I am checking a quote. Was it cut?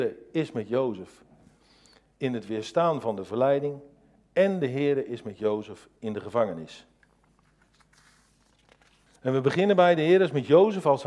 yes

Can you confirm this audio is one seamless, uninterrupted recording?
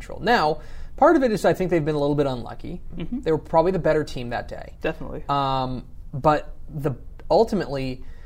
no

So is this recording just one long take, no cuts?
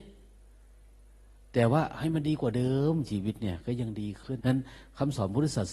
no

